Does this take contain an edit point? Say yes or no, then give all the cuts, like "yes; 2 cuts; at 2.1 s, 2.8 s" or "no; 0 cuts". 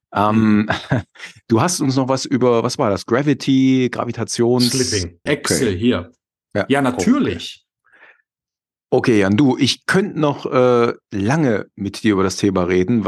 yes; 1 cut; at 5.3 s